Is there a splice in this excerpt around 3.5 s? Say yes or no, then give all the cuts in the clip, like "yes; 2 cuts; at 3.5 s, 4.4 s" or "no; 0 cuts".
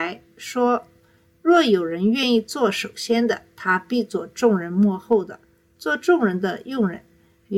no; 0 cuts